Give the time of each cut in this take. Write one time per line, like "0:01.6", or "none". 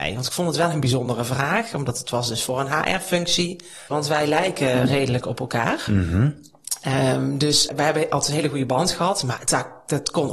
0:03.9
0:07.7